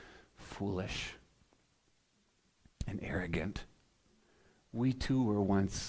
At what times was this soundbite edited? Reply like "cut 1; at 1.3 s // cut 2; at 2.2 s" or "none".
none